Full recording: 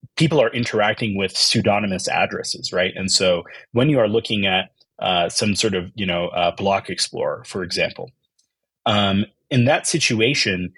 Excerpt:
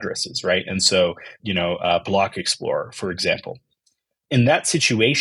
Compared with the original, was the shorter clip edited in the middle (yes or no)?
yes